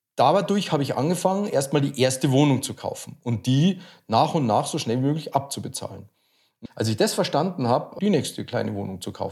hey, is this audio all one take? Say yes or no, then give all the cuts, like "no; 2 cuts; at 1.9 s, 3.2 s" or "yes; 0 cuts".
no; 2 cuts; at 6.7 s, 8.0 s